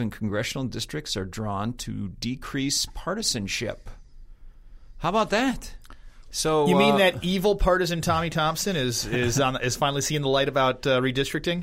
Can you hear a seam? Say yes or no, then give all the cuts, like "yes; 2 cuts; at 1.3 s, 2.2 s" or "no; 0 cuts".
yes; 1 cut; at 6.3 s